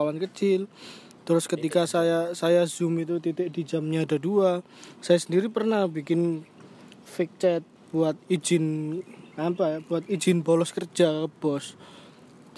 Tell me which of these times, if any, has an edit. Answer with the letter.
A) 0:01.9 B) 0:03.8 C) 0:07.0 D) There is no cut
C